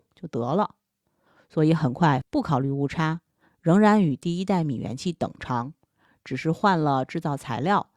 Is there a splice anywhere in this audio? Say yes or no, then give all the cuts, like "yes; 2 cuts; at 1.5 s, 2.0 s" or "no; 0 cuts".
yes; 1 cut; at 2.2 s